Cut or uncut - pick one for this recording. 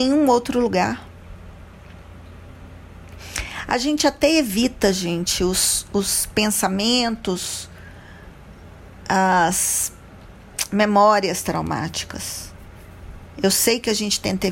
uncut